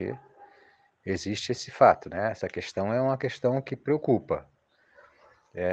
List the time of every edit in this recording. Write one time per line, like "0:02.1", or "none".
none